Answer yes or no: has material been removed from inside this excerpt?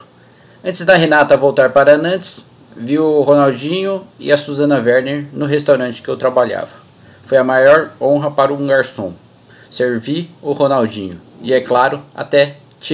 no